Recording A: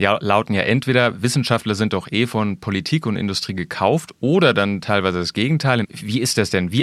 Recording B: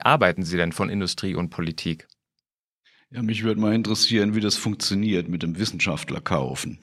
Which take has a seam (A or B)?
A